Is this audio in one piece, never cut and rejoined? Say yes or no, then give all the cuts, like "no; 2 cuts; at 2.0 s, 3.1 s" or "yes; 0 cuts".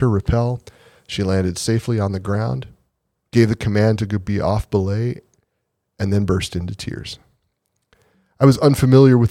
yes; 0 cuts